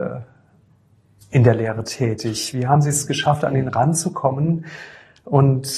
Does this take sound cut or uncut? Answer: uncut